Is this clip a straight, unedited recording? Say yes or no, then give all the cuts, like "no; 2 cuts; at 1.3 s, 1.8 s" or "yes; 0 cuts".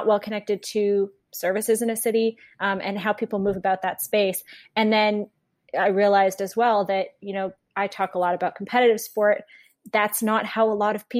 yes; 0 cuts